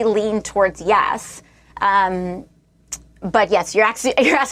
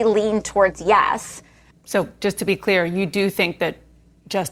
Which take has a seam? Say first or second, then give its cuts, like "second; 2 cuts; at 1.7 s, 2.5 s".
second; 1 cut; at 1.7 s